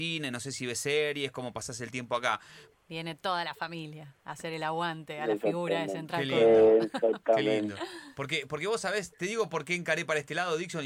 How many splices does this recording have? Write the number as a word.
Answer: one